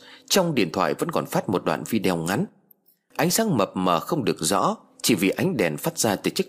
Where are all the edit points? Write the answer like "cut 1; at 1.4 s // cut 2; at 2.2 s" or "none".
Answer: none